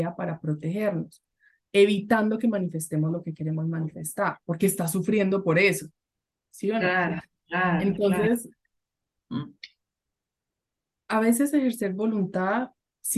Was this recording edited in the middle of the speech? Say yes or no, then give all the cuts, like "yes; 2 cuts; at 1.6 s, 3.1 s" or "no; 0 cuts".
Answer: yes; 1 cut; at 9.2 s